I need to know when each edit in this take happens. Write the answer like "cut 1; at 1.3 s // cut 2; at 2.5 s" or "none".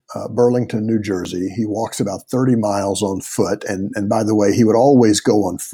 none